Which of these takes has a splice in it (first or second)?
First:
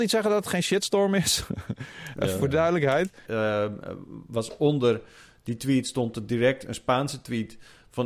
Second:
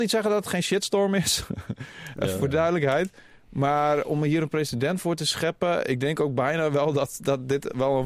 first